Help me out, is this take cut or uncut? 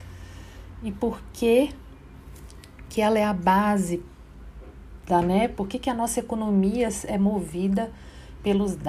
uncut